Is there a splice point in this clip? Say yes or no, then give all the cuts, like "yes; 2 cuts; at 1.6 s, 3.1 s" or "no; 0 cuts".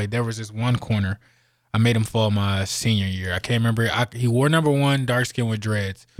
no; 0 cuts